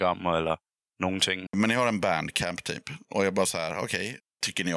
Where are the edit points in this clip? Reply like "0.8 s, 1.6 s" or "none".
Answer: 1.5 s